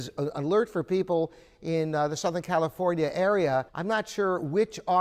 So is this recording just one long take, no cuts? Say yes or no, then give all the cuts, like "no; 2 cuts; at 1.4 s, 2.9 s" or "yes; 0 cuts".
no; 1 cut; at 3.7 s